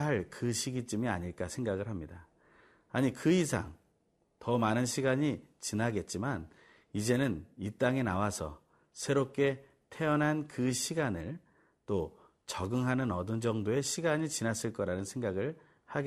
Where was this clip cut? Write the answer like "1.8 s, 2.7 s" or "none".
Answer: none